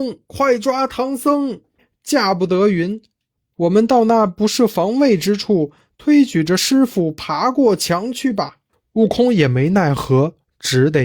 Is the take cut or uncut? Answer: cut